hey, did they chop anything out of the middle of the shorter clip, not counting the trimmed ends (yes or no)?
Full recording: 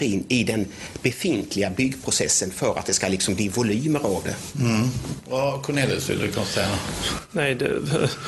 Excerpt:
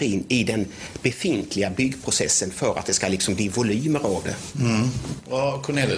no